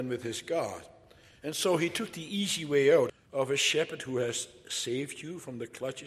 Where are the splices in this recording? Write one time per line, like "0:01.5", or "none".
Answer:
0:03.1